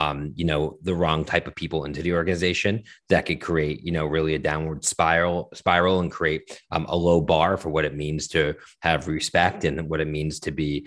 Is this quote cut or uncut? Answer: uncut